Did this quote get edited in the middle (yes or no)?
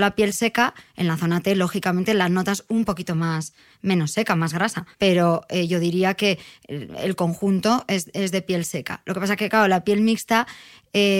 yes